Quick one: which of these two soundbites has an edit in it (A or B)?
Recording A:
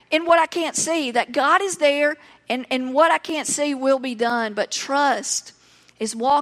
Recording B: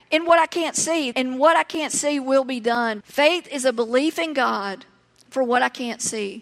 B